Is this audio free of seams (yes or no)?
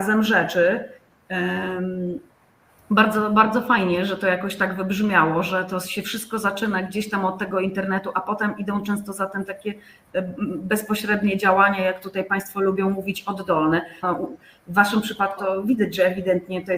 no